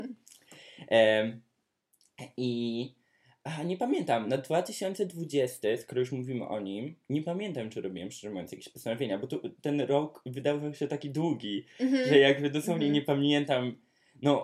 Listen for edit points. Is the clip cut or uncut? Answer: uncut